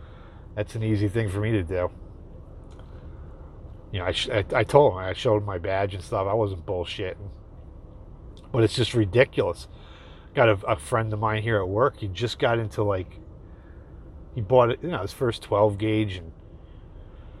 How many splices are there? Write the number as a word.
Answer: zero